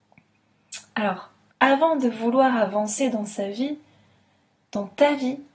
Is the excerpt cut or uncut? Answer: cut